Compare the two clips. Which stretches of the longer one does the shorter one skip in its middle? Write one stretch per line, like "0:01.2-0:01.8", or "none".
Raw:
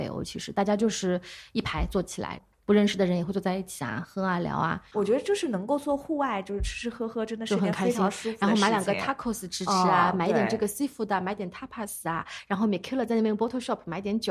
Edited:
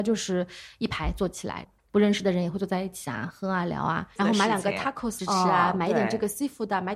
0:04.9-0:08.4
0:09.4-0:09.6

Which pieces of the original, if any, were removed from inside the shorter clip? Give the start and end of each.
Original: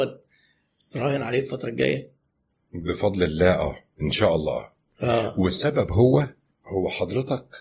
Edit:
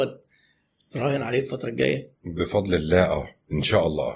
0:02.2-0:02.6

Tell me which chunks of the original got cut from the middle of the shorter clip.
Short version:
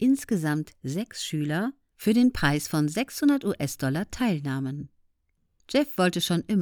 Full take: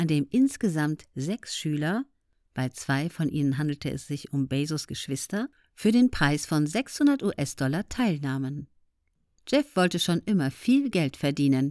0:02.2-0:05.7

